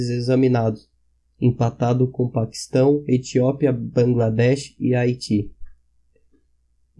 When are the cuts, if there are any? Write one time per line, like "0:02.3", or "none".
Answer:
none